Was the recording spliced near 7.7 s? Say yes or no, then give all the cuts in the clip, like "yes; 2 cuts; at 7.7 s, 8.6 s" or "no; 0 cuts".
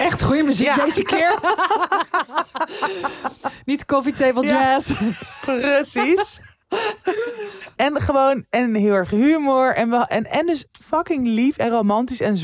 yes; 2 cuts; at 6.6 s, 7.7 s